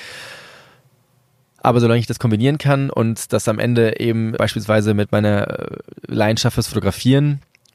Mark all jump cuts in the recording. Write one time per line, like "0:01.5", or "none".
0:04.4